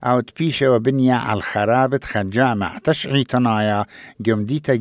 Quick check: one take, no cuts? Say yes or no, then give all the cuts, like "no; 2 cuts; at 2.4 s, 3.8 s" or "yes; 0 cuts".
yes; 0 cuts